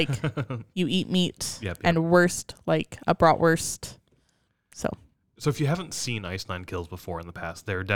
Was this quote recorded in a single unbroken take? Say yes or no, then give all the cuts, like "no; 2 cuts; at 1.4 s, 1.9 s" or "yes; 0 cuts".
yes; 0 cuts